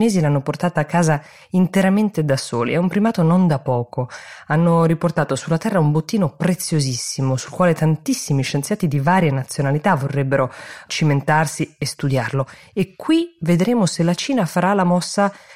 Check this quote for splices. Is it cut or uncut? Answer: uncut